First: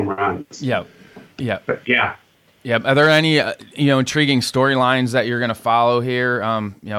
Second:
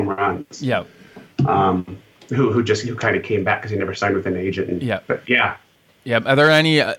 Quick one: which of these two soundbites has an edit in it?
first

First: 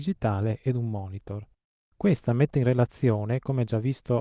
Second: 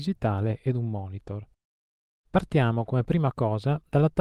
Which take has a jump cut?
first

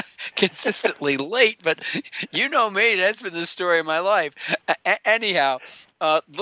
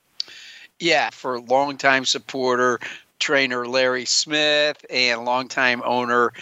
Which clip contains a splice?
second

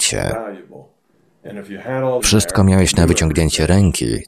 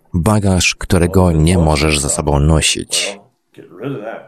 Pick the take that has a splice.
first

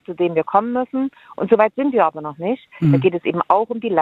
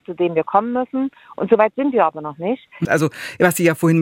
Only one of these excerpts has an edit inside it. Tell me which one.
second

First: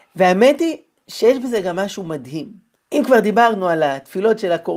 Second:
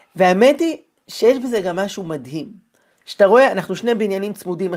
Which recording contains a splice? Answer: first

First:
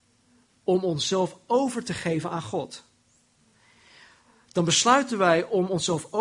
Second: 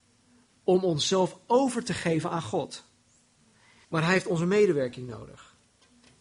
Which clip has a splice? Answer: second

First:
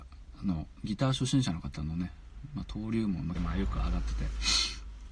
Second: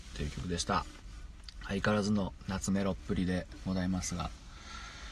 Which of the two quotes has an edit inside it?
first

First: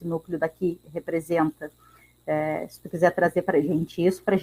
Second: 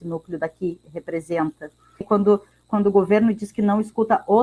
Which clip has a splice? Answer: second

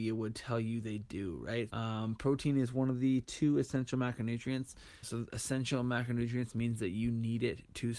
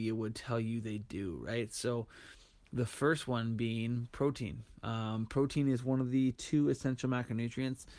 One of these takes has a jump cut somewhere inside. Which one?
first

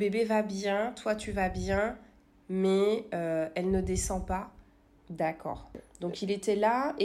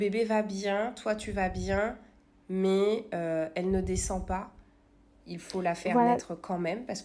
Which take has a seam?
first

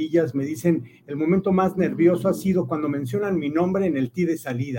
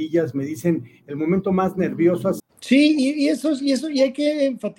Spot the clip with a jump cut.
second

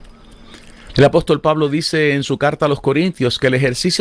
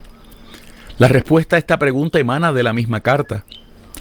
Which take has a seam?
first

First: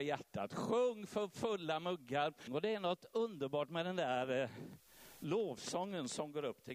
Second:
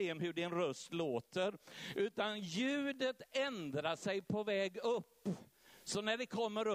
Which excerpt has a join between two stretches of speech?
first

